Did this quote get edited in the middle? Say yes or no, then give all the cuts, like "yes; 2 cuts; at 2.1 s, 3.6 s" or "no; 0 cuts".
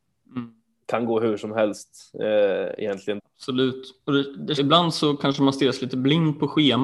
yes; 2 cuts; at 3.2 s, 4.6 s